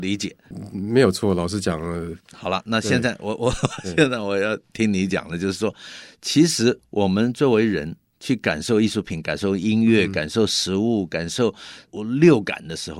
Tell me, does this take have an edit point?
no; 0 cuts

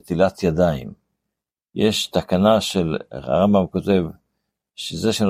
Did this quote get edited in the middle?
no; 0 cuts

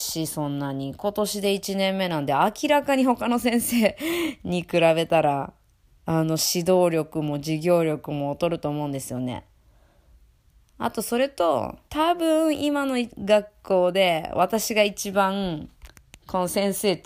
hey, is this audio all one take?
no; 2 cuts; at 10.6 s, 11.9 s

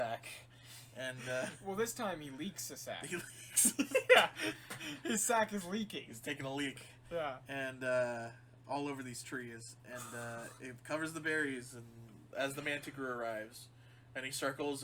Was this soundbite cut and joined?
no; 0 cuts

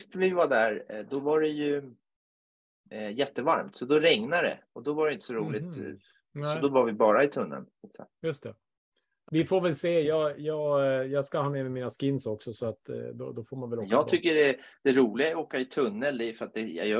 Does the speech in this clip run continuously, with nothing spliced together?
no; 1 cut; at 9.3 s

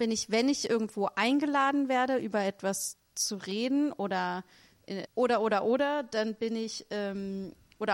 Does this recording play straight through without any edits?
no; 1 cut; at 5.1 s

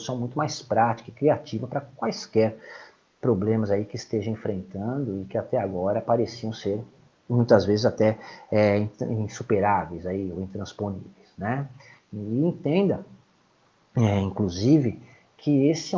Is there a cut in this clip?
no; 0 cuts

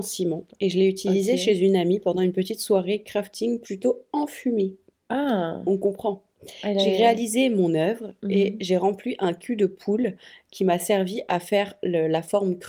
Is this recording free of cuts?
yes; 0 cuts

